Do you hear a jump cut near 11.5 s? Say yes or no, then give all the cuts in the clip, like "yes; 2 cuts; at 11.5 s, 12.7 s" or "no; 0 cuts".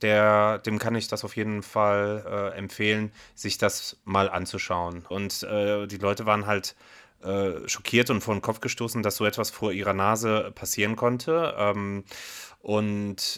no; 1 cut; at 5.1 s